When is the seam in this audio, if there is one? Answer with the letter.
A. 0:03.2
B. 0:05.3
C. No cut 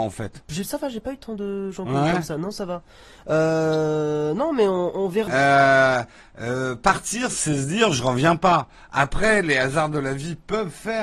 B